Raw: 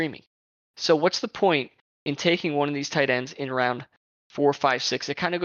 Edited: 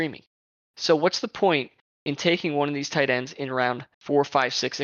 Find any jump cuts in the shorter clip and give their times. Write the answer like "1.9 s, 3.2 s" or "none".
3.9 s

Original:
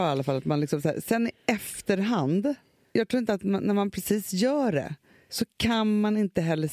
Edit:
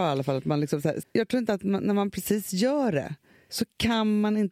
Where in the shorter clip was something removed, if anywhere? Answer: 1.0 s

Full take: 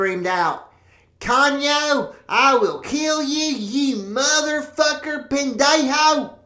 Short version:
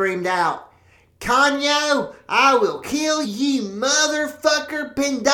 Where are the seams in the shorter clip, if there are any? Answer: 3.2 s

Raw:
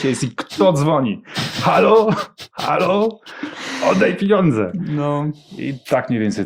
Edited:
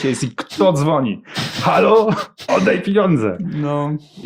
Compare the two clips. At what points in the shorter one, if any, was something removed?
2.5 s

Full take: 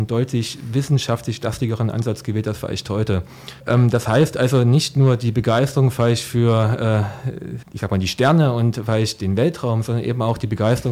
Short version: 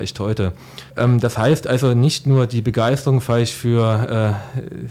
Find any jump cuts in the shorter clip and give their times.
none

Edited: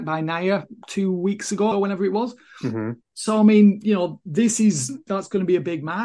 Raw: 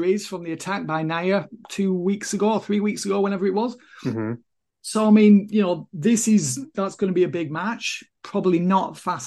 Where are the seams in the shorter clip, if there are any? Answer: 1.7 s, 3.0 s

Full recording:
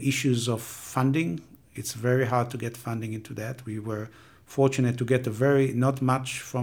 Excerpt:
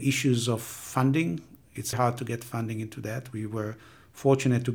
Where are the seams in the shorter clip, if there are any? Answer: 1.9 s

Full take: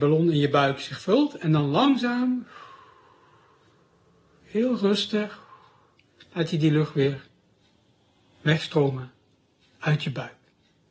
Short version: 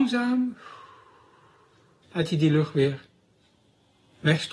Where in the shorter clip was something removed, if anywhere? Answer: 2.0 s

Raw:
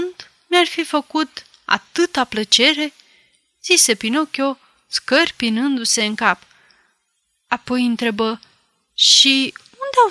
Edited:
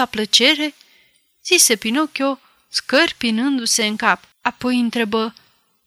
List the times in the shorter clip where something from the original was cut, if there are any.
4.3 s

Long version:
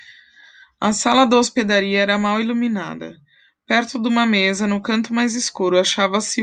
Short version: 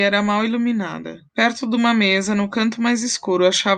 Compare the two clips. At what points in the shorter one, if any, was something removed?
1.3 s

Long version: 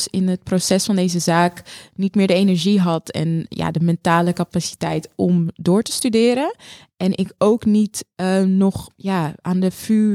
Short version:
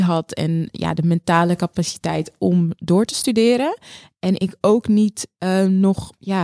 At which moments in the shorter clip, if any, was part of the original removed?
none

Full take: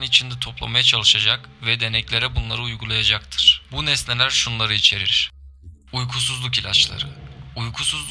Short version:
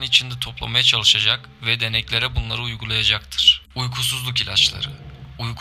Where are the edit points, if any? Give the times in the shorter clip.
3.6 s

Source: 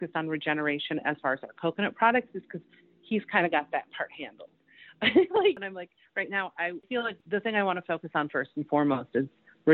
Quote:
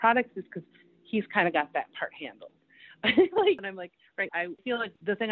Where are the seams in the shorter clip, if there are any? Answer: 4.3 s

